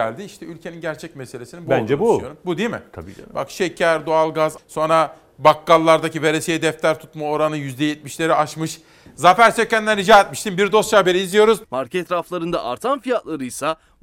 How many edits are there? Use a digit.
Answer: 3